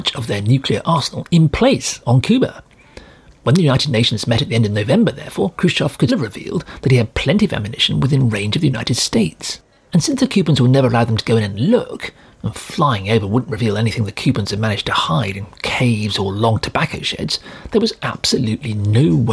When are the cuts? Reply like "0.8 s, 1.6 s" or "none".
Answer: 6.1 s, 9.9 s